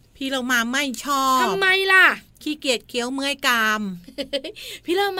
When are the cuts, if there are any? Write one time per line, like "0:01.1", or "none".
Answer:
none